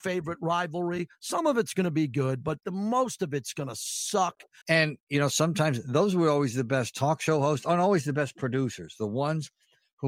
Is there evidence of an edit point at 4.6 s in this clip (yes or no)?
yes